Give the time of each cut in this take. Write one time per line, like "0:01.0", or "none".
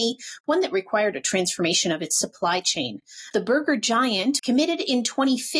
0:03.3
0:04.4